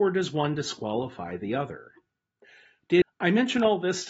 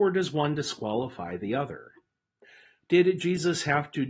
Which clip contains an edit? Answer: first; 1 cut; at 3.0 s

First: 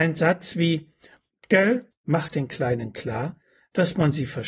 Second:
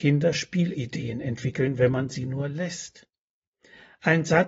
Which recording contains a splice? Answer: first; 1 cut; at 1.9 s

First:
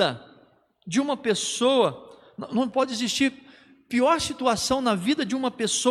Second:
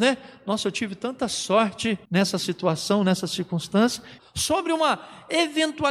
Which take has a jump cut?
second; 2 cuts; at 2.1 s, 4.2 s

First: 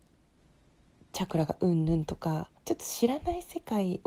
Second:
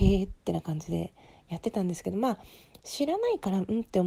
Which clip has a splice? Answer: first; 1 cut; at 2.6 s

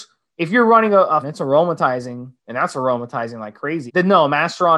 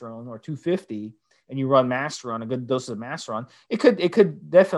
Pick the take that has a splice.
first; 3 cuts; at 1.2 s, 2.4 s, 3.9 s

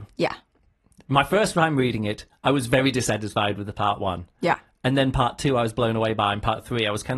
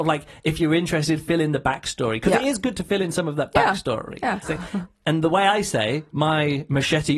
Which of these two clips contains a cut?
second; 1 cut; at 4.4 s

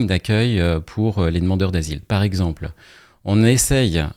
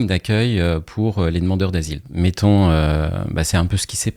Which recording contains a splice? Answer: second; 1 cut; at 2.0 s

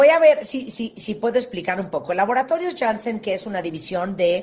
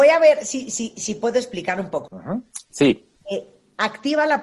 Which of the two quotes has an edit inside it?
second; 1 cut; at 2.0 s

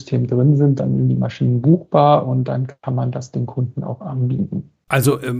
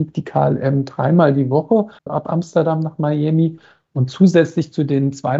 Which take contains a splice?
second; 1 cut; at 2.0 s

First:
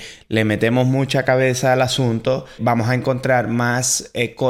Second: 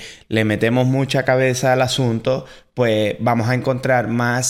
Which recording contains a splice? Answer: first; 1 cut; at 2.6 s

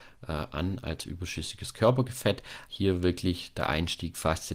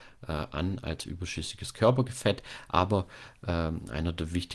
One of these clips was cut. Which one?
first; 1 cut; at 2.7 s

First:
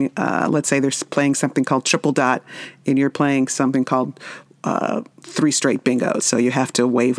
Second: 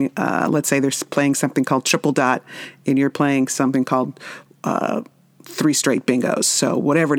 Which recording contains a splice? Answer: first; 2 cuts; at 5.1 s, 6.2 s

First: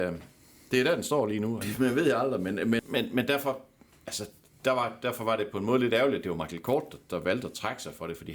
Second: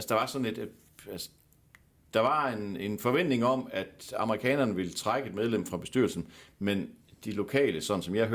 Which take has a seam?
first; 2 cuts; at 1.6 s, 2.8 s

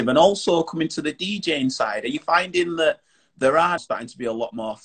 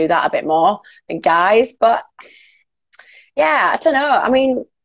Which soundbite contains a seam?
first; 1 cut; at 3.8 s

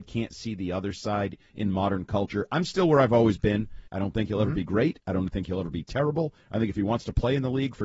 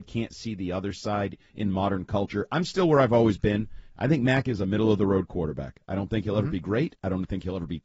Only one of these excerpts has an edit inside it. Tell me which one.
first; 1 cut; at 3.9 s

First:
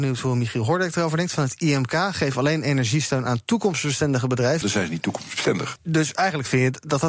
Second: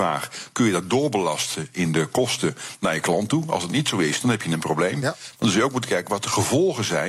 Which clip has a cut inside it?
first; 2 cuts; at 4.6 s, 5.8 s

